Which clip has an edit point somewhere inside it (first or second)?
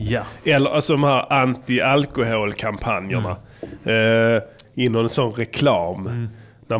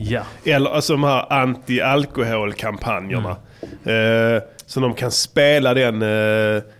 first